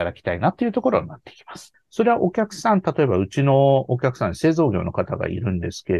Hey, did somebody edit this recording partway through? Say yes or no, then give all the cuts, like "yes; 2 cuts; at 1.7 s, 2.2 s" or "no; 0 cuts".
yes; 1 cut; at 1.7 s